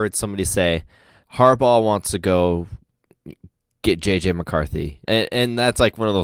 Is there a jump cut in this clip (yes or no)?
yes